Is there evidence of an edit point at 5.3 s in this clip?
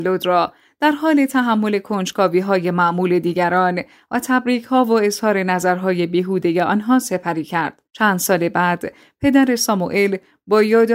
no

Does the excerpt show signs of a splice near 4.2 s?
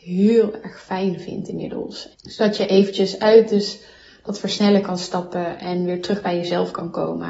no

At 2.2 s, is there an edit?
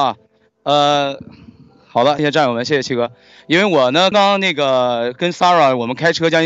yes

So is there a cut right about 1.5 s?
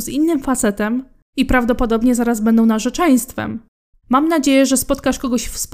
no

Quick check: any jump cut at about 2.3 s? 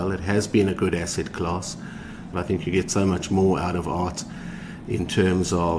yes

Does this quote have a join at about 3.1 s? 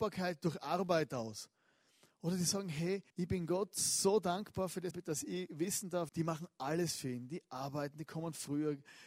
yes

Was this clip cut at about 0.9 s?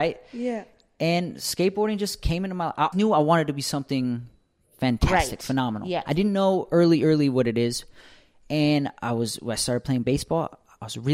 no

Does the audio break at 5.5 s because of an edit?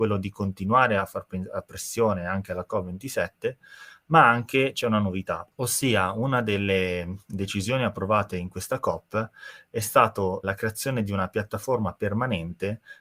yes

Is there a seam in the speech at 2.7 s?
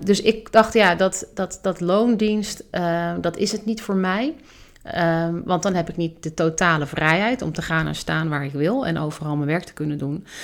no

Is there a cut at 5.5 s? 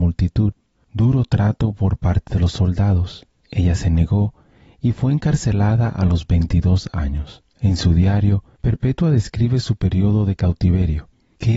no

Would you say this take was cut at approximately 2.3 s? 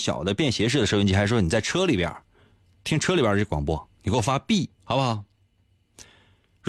no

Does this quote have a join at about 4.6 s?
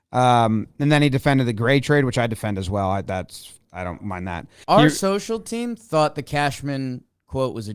yes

